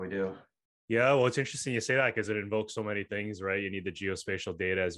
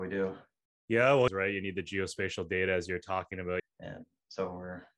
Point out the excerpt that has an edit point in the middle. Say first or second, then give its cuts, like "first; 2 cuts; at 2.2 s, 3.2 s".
second; 2 cuts; at 1.3 s, 3.6 s